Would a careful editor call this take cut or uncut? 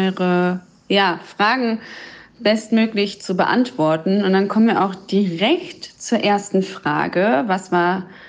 uncut